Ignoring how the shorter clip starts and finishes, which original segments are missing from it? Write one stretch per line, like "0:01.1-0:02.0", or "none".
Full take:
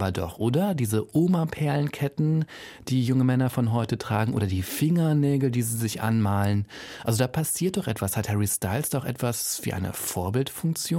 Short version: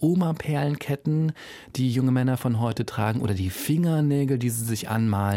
none